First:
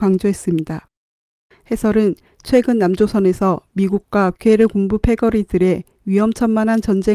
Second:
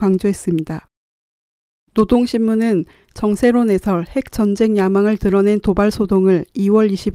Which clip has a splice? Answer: first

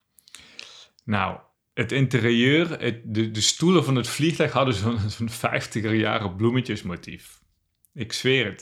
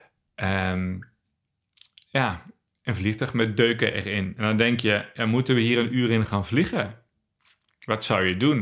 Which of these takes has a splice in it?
first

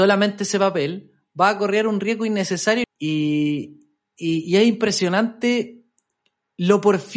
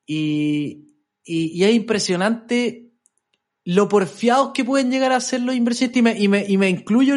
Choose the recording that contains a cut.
first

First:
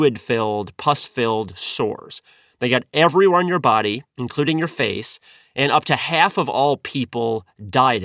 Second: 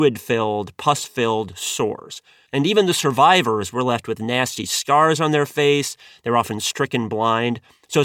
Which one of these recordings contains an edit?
second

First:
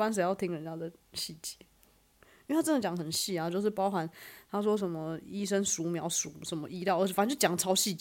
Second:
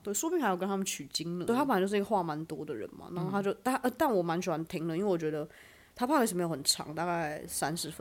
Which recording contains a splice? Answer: second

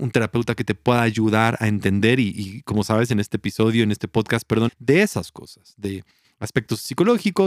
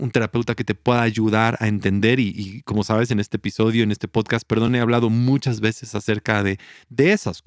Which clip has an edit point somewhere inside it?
first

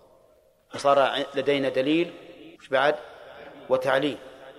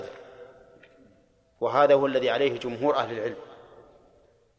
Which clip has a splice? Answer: first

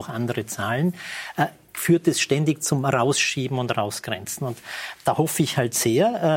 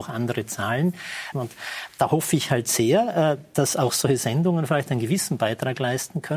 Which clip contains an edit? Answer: second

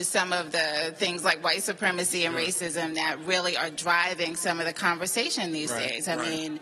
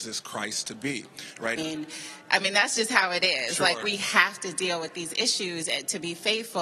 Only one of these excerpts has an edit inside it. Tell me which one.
second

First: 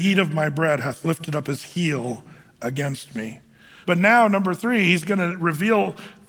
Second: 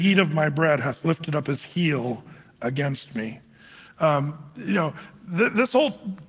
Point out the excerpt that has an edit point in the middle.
first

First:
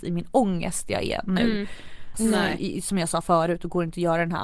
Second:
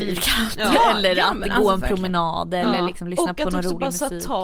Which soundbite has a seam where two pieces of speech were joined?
first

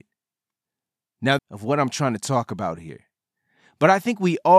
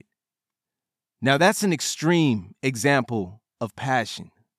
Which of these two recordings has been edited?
first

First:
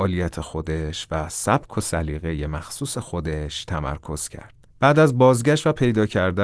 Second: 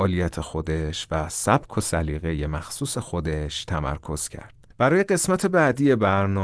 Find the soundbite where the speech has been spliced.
second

